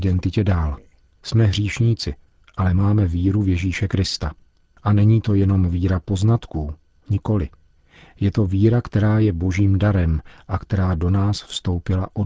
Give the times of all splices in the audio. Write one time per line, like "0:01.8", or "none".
0:01.2